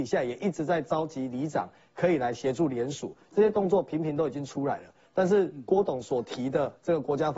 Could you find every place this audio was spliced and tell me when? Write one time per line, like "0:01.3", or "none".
none